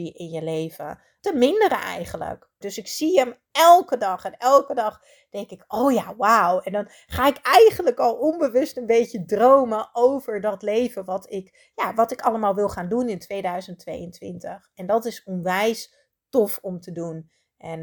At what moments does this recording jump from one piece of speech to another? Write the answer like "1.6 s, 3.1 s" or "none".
1.2 s, 2.6 s